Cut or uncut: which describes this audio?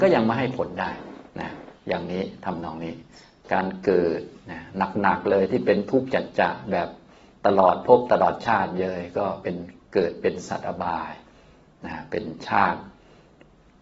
uncut